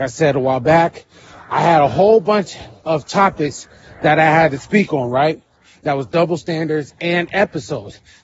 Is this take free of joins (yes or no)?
yes